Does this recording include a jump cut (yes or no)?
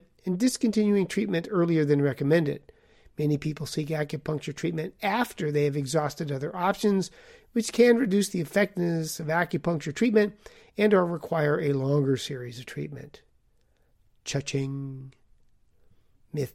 no